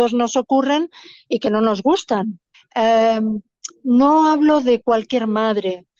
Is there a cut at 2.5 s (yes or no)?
yes